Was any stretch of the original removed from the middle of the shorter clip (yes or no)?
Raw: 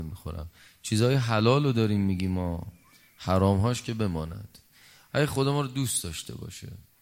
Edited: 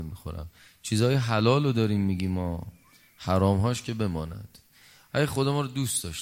no